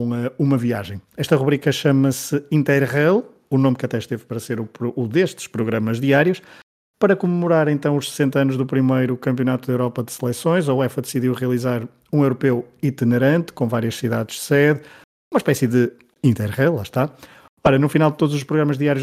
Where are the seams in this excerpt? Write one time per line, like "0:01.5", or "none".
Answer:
none